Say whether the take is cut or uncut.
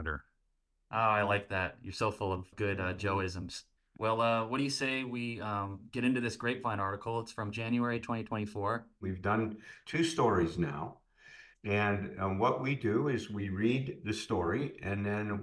uncut